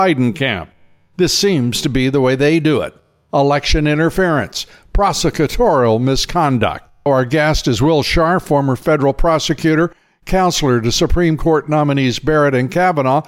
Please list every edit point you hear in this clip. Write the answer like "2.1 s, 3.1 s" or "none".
7.1 s

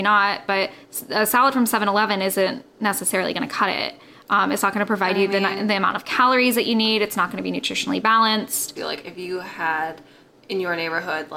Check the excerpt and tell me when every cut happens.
8.8 s

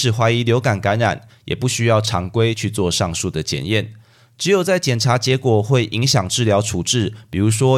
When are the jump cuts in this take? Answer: none

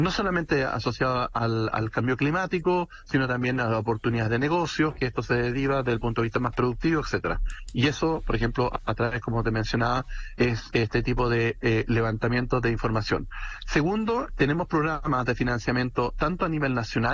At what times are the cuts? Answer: 14.3 s

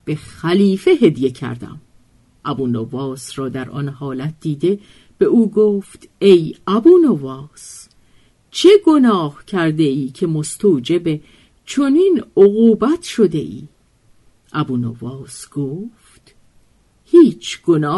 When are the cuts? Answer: 2.4 s

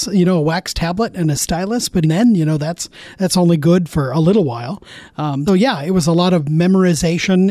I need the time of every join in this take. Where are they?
2.0 s, 5.5 s

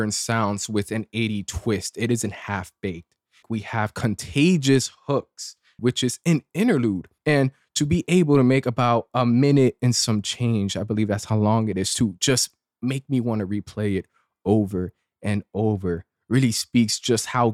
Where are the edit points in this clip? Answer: 3.4 s, 5.8 s, 7.2 s

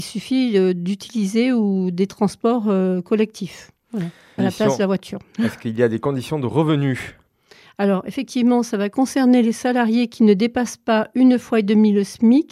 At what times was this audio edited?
4.4 s

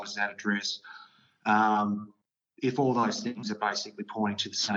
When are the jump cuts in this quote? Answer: none

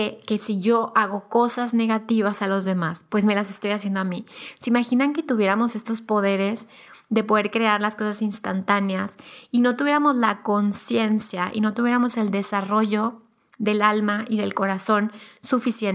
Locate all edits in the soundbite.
none

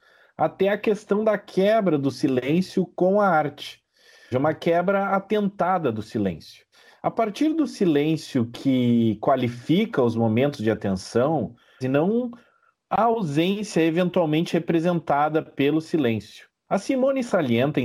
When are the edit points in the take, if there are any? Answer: 4.3 s, 11.8 s

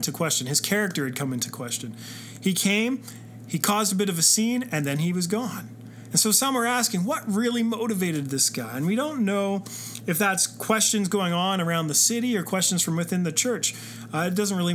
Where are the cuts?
none

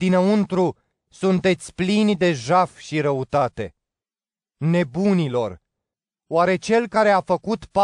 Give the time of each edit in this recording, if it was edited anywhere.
none

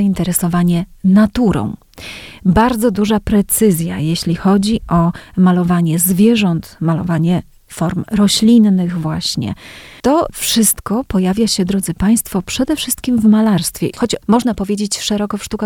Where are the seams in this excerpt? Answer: none

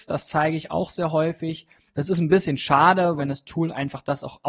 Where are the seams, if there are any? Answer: 1.9 s, 3.2 s

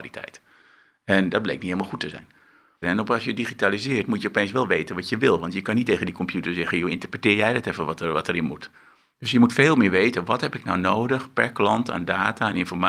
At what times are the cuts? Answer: 2.8 s

